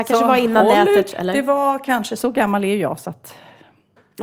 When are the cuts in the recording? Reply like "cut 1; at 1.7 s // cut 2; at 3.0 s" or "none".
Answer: cut 1; at 1.1 s